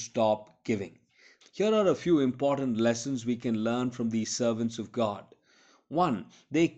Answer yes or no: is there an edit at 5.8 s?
no